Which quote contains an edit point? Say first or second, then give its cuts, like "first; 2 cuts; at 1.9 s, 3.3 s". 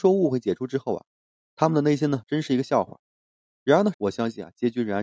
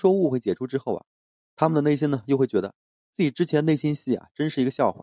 first; 2 cuts; at 2.2 s, 3.9 s